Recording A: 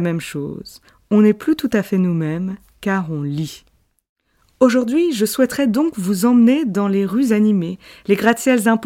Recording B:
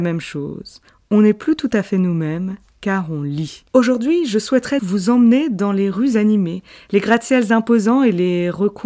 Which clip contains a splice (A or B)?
B